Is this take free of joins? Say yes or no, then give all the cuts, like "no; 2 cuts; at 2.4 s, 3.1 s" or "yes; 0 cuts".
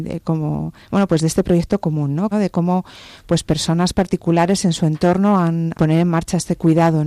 no; 2 cuts; at 2.3 s, 5.7 s